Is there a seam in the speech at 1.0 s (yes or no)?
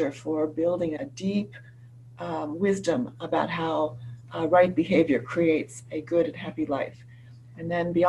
yes